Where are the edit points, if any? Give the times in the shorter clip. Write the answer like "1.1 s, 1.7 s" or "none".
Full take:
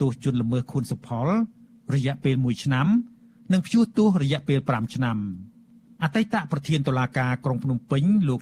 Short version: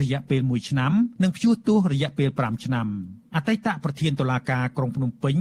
1.2 s, 3.3 s